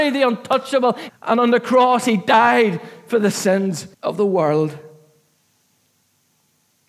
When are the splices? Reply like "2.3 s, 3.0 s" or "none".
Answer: 1.1 s, 3.9 s